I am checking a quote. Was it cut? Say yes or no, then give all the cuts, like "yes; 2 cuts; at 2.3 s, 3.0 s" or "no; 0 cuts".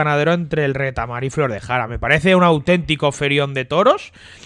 no; 0 cuts